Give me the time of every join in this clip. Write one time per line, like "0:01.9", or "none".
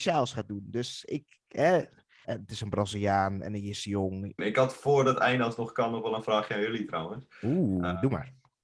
0:02.2
0:04.4